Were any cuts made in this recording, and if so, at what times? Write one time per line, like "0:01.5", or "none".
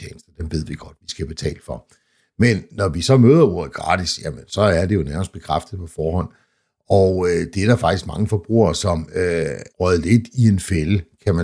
0:09.7